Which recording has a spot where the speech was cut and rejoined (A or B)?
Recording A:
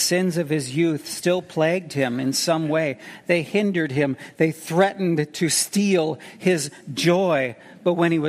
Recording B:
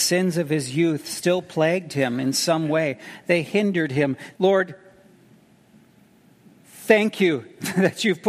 B